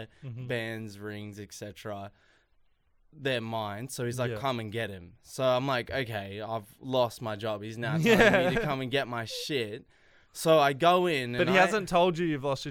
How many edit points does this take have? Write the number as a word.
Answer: zero